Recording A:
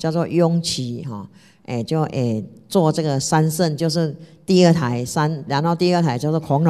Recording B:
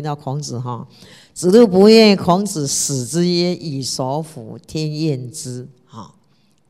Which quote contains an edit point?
A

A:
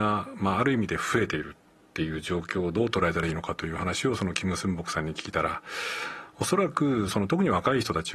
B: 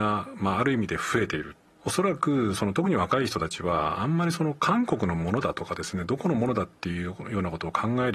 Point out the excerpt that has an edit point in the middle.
B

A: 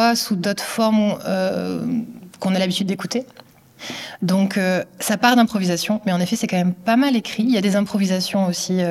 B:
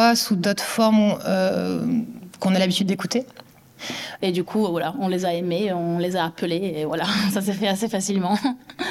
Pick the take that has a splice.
B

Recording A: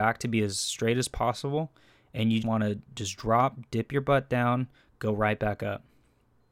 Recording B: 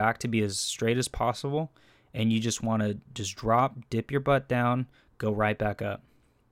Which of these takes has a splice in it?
A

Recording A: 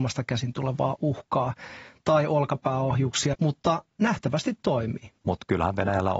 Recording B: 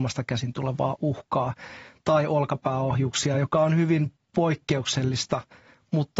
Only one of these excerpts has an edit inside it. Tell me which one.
A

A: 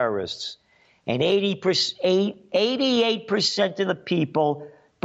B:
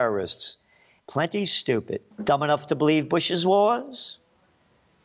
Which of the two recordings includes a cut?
B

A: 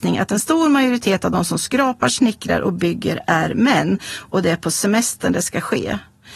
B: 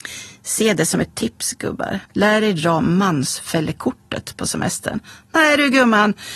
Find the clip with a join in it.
B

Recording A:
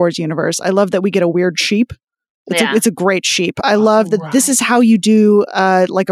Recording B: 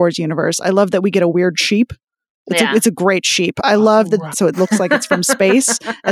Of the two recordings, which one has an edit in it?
B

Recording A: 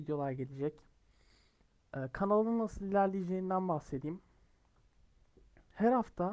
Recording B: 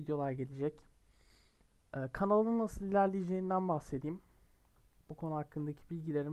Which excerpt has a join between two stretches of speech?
B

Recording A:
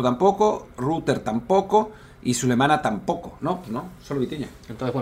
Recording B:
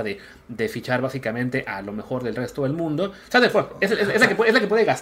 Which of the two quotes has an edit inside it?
B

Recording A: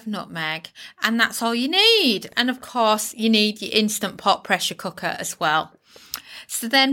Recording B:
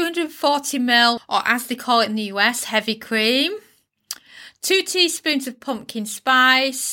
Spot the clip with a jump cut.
B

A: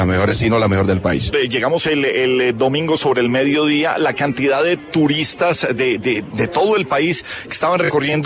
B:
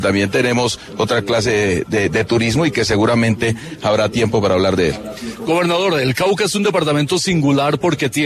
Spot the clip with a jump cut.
A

